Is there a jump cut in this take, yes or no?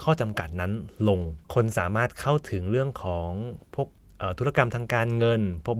yes